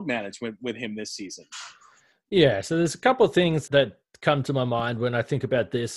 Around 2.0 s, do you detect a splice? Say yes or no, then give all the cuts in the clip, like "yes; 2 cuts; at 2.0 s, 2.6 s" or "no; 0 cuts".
no; 1 cut; at 3.7 s